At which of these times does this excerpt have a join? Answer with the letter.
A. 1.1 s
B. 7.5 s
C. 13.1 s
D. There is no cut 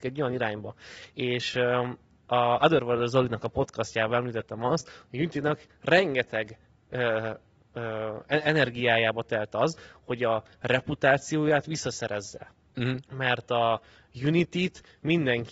D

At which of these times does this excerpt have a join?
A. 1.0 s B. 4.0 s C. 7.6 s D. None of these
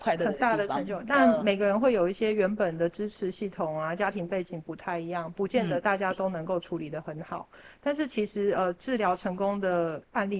D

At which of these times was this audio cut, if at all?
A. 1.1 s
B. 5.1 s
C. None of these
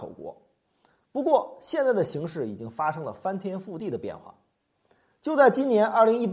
C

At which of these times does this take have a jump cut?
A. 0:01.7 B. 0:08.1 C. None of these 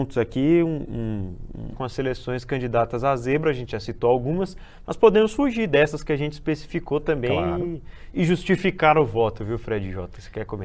A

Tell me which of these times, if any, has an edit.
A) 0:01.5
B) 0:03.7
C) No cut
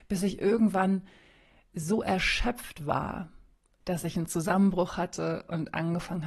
C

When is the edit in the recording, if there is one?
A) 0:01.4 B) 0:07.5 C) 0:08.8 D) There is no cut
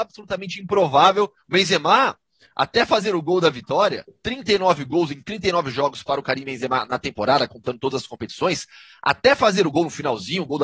A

